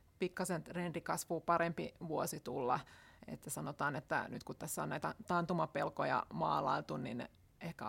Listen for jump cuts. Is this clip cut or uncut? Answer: uncut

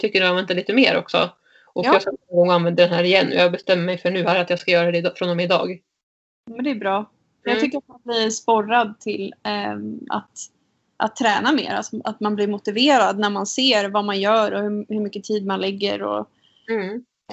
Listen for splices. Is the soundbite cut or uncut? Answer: uncut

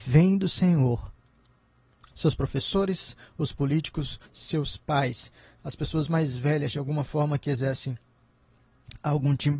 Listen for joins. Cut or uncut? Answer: cut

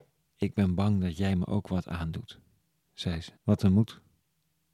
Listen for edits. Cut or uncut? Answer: cut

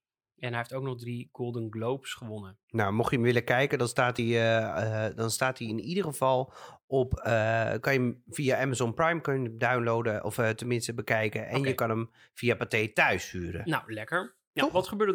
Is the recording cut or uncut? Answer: uncut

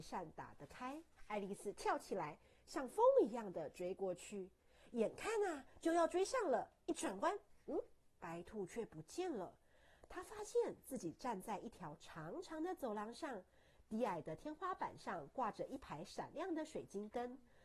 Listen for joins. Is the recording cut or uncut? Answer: cut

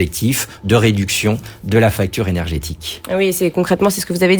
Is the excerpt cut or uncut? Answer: uncut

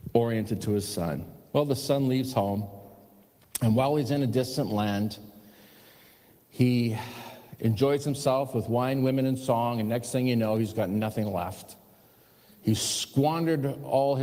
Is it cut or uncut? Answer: uncut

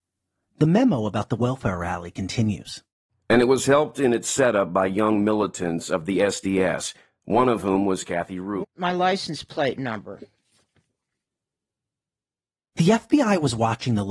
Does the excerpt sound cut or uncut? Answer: cut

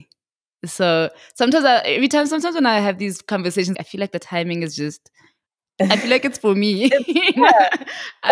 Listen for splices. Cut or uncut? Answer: cut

